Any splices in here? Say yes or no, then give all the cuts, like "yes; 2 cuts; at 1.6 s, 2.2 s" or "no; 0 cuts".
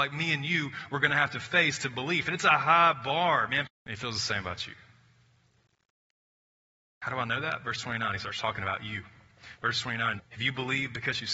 yes; 2 cuts; at 3.7 s, 10.2 s